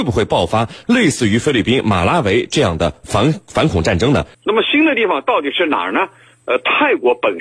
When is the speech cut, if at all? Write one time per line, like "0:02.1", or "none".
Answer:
0:04.3